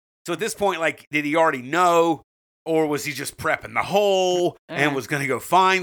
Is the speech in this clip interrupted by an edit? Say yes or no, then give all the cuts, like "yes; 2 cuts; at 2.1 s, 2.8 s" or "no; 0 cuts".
no; 0 cuts